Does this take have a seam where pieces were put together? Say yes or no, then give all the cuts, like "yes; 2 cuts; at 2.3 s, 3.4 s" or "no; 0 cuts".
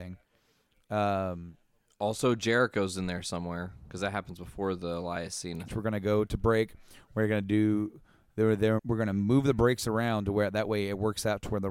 yes; 2 cuts; at 5.7 s, 8.8 s